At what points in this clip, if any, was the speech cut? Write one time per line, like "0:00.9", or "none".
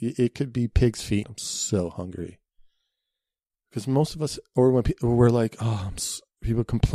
0:01.2

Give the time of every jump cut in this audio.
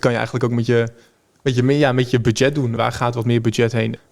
0:02.8

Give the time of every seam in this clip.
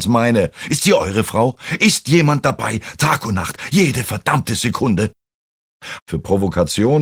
0:06.0

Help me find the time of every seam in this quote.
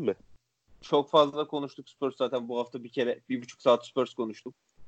none

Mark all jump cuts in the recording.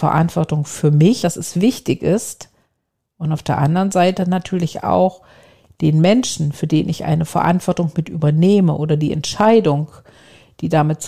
0:01.2

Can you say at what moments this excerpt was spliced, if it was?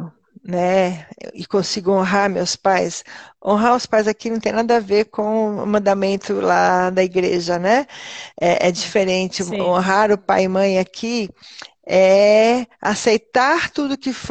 none

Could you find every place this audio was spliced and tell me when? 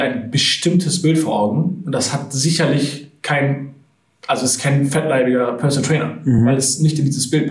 none

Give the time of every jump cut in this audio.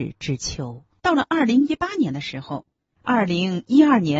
0:01.0
0:02.9

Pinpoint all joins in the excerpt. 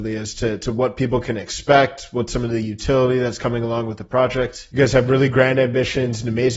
0:04.7

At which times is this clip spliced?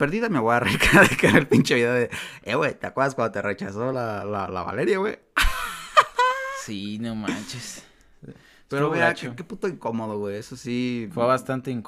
none

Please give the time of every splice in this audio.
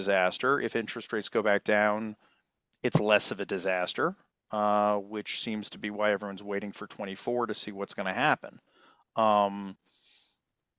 none

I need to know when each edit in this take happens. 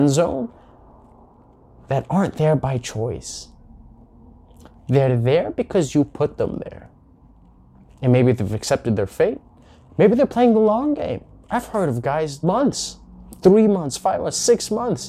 0:12.4

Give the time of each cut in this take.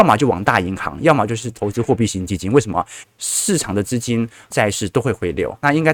0:03.0
0:04.5

